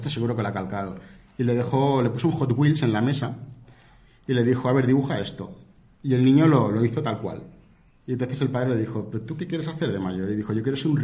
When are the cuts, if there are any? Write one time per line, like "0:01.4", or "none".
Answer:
none